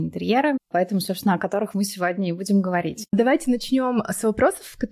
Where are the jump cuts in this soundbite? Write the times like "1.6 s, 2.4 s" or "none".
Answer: 3.1 s